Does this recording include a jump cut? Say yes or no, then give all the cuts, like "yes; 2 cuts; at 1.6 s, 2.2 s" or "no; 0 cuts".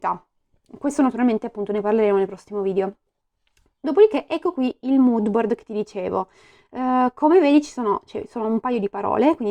no; 0 cuts